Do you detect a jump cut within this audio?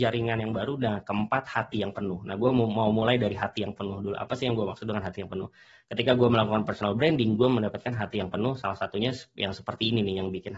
no; 0 cuts

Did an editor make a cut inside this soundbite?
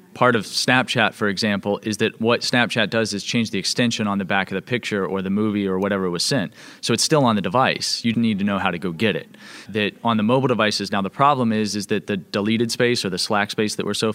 yes; 2 cuts; at 8.1 s, 9.7 s

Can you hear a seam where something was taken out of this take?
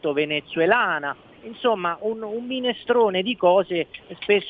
no; 0 cuts

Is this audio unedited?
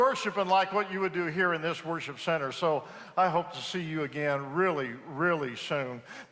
yes; 0 cuts

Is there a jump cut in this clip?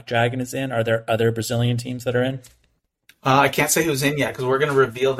no; 0 cuts

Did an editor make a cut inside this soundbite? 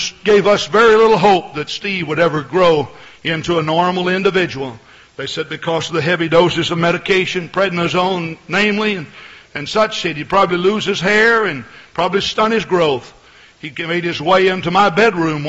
no; 0 cuts

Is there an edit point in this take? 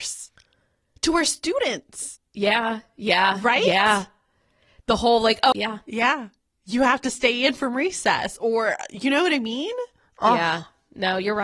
yes; 1 cut; at 5.5 s

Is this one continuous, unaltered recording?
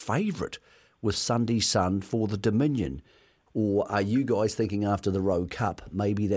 no; 1 cut; at 3.5 s

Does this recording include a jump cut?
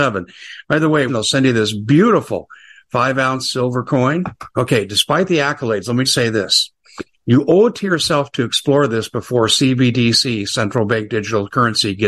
yes; 3 cuts; at 1.1 s, 4.5 s, 6.0 s

